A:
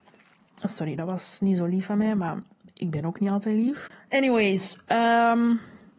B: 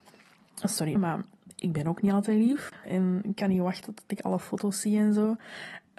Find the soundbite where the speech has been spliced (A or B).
B